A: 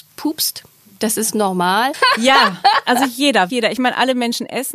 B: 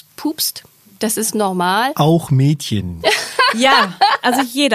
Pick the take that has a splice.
A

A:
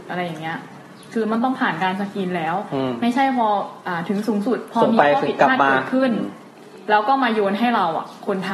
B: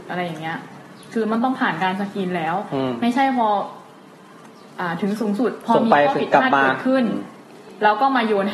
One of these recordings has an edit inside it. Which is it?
A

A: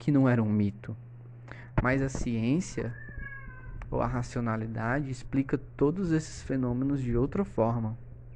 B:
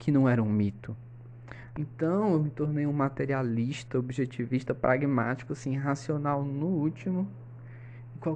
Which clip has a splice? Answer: B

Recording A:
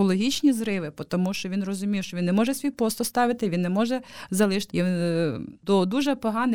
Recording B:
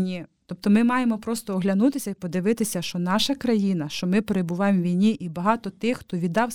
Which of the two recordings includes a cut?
A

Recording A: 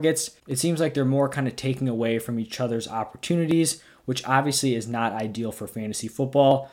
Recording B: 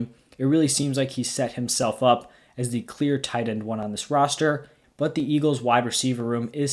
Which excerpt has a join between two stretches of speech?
B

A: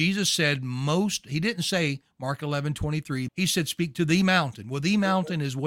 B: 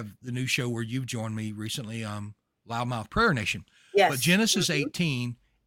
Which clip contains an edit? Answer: A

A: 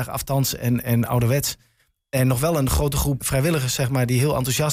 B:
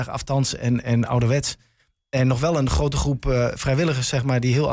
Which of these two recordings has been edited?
A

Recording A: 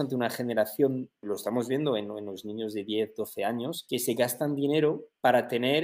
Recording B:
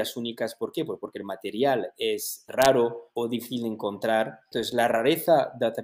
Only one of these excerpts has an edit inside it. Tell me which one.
A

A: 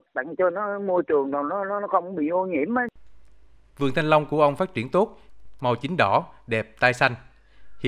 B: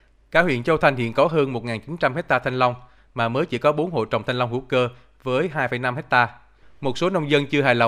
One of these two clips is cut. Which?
A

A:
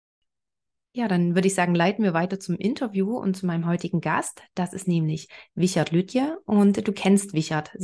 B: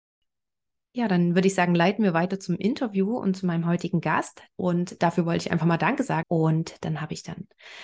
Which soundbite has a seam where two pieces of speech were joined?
B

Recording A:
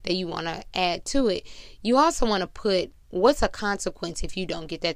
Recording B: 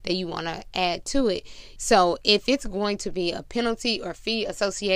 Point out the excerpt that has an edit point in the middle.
B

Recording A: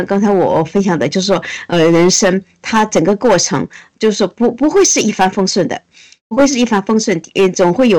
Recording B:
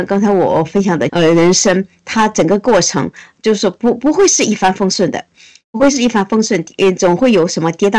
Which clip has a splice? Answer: B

